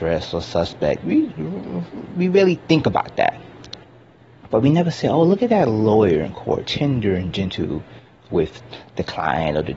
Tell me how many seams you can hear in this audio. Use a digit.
2